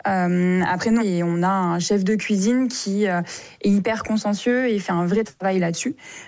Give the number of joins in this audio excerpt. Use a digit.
1